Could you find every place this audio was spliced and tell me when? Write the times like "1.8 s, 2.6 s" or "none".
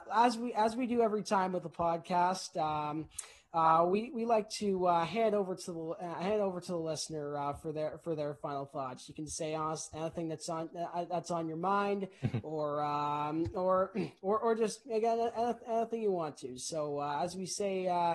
none